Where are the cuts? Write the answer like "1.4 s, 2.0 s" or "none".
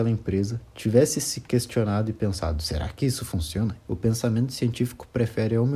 3.8 s